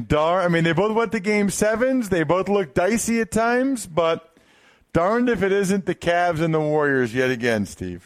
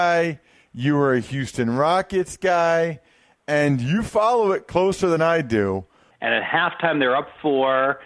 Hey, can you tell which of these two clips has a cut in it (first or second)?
second